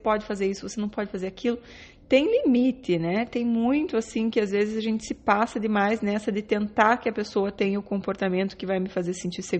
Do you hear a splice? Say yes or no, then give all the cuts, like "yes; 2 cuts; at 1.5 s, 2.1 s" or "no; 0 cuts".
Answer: no; 0 cuts